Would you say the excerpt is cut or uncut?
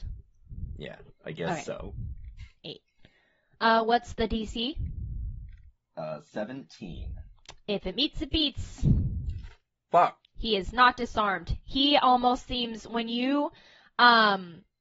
uncut